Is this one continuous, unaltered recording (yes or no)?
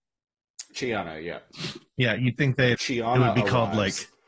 no